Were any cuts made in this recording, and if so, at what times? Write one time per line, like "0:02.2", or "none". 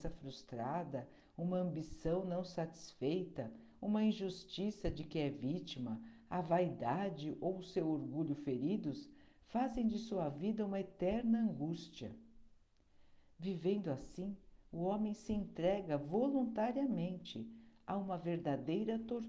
none